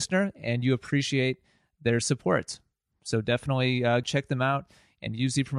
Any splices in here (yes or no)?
yes